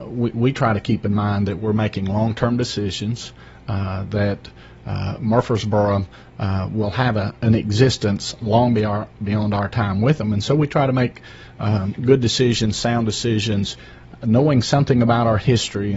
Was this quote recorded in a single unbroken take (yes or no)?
no